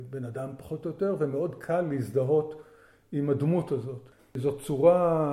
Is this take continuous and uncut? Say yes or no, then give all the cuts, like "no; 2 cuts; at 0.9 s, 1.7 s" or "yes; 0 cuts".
no; 1 cut; at 4.2 s